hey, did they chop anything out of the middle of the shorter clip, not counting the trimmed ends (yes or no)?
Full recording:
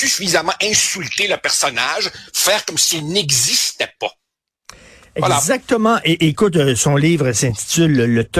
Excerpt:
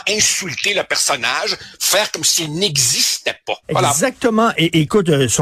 yes